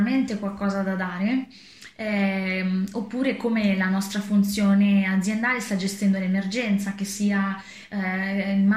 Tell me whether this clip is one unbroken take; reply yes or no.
yes